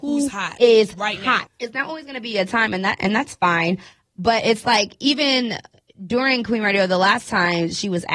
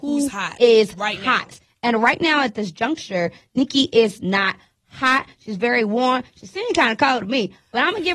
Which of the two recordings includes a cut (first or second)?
first